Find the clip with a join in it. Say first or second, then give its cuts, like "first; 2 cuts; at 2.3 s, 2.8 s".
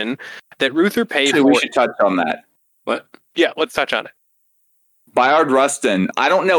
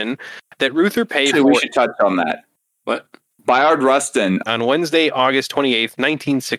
second; 2 cuts; at 3.3 s, 4.5 s